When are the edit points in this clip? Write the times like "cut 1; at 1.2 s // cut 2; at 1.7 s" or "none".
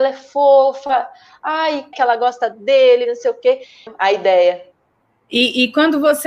cut 1; at 1.9 s // cut 2; at 3.9 s

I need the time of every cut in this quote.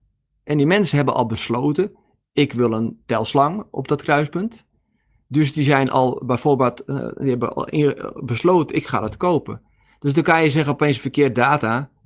none

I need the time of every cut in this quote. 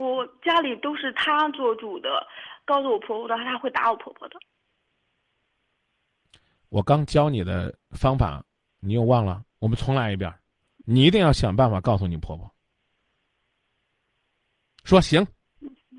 none

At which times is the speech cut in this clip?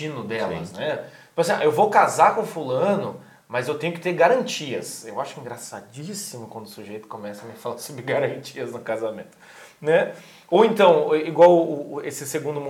none

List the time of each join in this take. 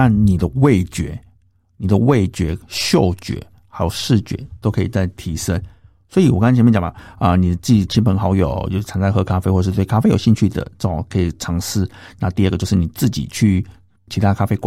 none

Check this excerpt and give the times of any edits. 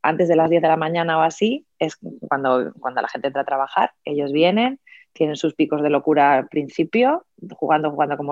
none

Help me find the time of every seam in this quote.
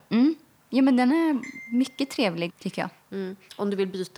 cut 1; at 2.5 s

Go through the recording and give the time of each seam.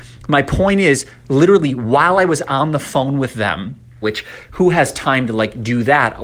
cut 1; at 4.0 s

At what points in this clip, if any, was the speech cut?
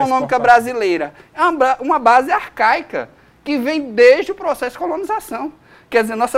none

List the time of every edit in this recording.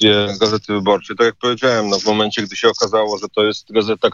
none

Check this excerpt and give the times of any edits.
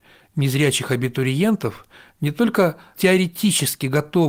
cut 1; at 2.9 s

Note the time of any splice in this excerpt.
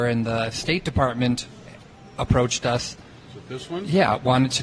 none

